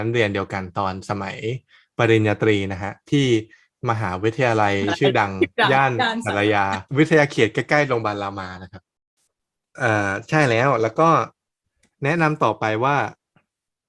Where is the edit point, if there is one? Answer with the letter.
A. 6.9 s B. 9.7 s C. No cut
A